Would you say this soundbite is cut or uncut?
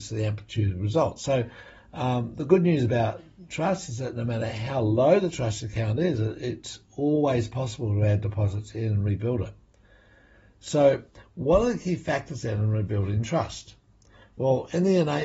uncut